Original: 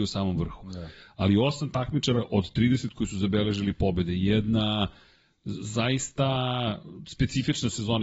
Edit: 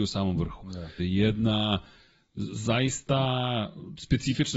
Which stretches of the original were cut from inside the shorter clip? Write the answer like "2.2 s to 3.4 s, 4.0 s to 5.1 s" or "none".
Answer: 1.0 s to 4.1 s